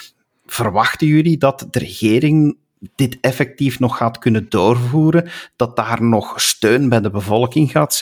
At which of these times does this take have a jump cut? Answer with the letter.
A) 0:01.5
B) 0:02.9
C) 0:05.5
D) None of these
D